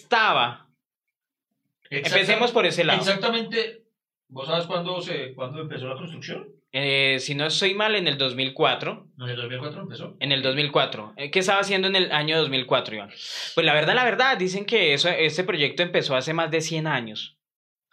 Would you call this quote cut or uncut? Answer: cut